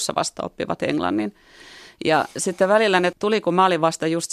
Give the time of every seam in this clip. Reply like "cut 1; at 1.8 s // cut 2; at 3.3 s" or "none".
cut 1; at 3.1 s